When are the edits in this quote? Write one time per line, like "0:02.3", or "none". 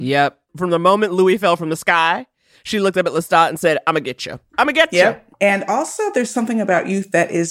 none